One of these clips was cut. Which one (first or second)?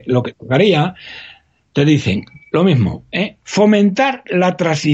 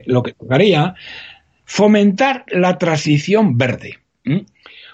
second